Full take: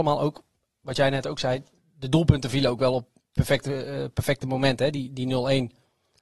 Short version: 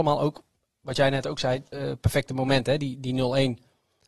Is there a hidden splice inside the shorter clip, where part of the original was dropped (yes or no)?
yes